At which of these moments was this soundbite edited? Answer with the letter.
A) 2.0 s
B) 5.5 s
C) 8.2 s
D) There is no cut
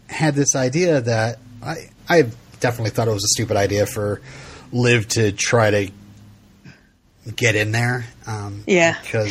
A